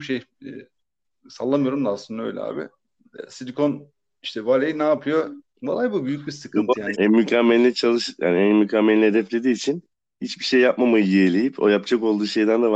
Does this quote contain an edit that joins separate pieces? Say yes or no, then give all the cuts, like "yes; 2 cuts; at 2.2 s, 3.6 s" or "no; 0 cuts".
yes; 2 cuts; at 5.4 s, 6.9 s